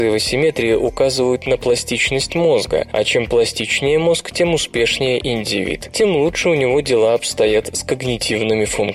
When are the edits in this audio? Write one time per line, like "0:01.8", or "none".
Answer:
none